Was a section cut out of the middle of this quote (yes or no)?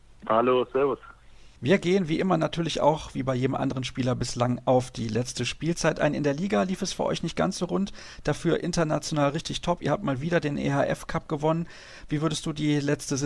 no